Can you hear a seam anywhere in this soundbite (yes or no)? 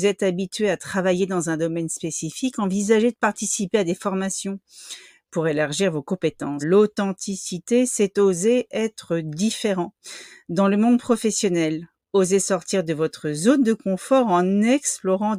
yes